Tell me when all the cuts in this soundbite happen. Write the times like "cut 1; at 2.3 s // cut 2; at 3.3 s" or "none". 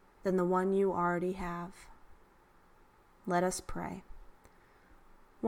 none